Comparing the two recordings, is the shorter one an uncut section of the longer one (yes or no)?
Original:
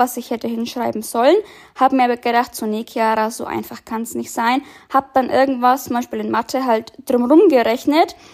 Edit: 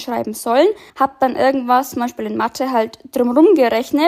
no